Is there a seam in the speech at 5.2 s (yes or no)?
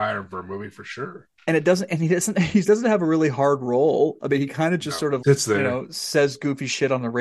yes